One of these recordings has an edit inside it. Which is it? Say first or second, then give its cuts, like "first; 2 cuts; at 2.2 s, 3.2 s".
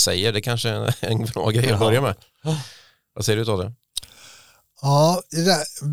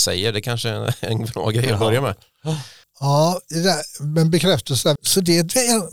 second; 2 cuts; at 2.8 s, 5.0 s